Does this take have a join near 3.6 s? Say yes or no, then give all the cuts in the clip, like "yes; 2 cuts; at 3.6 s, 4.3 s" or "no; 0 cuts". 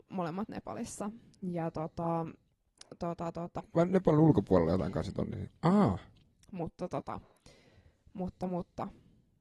yes; 2 cuts; at 3.6 s, 5.5 s